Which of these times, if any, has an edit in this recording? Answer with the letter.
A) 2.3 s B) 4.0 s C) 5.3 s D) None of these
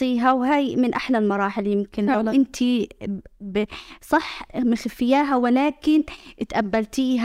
D